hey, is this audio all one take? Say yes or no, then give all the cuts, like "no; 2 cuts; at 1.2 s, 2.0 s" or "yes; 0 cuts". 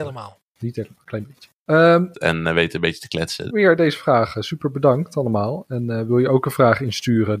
no; 2 cuts; at 2.1 s, 3.5 s